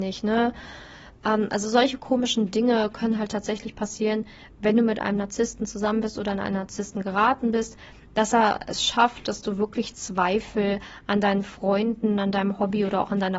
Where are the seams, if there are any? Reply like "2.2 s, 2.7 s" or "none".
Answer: 1.2 s